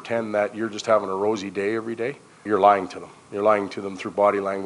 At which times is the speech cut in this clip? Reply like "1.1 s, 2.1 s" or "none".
2.5 s